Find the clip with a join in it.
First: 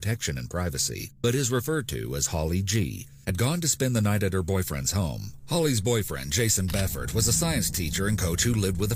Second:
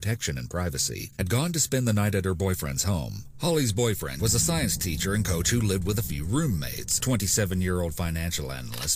second; 2 cuts; at 1.1 s, 4.2 s

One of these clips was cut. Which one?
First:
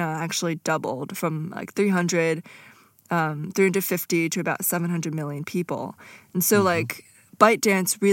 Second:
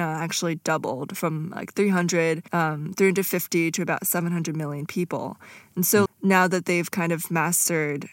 second; 2 cuts; at 2.5 s, 6.1 s

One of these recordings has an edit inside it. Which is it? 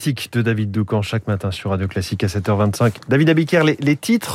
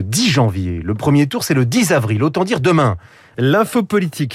second; 1 cut; at 3.3 s

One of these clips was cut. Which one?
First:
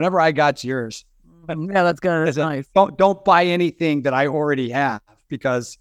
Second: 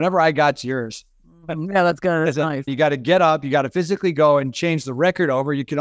second; 1 cut; at 2.7 s

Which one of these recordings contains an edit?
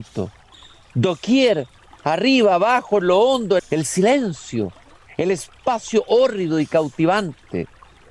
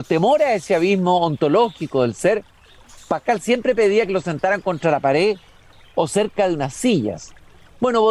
first; 1 cut; at 3.6 s

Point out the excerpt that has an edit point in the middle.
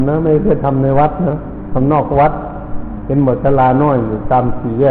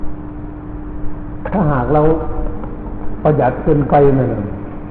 first; 1 cut; at 1.3 s

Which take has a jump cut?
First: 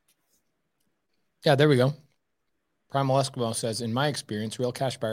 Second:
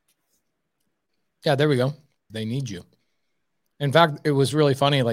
second; 1 cut; at 2.3 s

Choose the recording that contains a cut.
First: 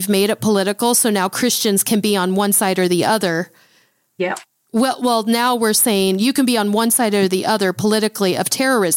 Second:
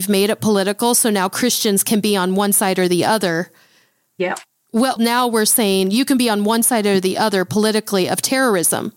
second; 1 cut; at 5.0 s

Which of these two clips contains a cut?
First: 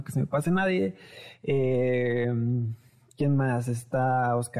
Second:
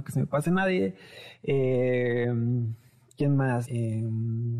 second; 1 cut; at 3.6 s

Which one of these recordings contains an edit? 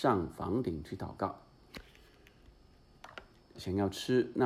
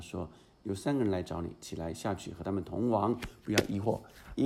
first; 1 cut; at 3.6 s

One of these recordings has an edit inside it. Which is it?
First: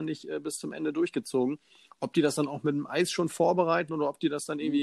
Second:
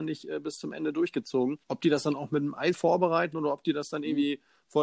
second; 2 cuts; at 1.6 s, 2.7 s

